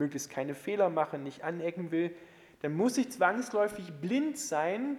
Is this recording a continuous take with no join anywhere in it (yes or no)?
yes